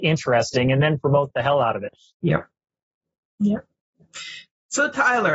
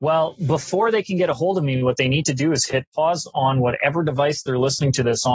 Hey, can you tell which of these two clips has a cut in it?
first; 1 cut; at 2.1 s

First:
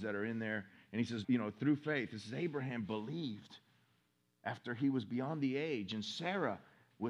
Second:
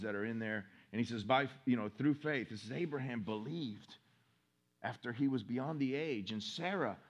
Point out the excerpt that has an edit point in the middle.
first; 1 cut; at 1.2 s

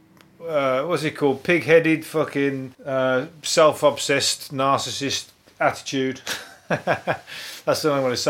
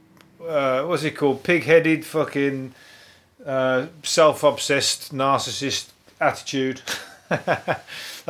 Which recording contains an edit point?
first; 1 cut; at 2.7 s

